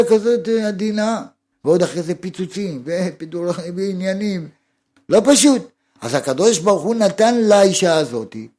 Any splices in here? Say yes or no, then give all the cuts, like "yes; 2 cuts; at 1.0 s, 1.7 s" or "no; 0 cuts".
yes; 1 cut; at 1.5 s